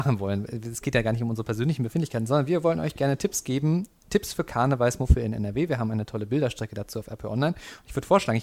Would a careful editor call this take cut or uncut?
uncut